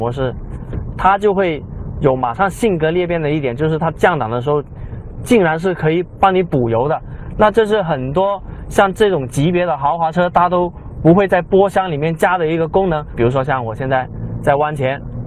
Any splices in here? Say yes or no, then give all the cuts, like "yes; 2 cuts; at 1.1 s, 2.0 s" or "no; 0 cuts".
no; 0 cuts